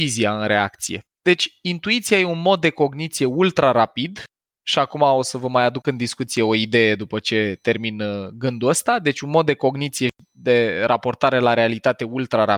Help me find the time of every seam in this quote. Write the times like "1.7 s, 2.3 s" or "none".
1.1 s